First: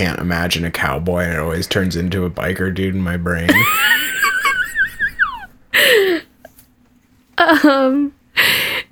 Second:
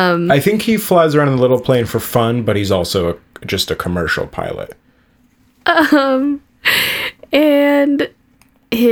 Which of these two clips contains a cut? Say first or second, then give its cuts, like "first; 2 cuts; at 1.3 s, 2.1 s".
second; 1 cut; at 5.1 s